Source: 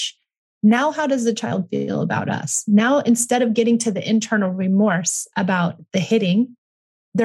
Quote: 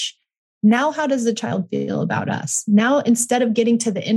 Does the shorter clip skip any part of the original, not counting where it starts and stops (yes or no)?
no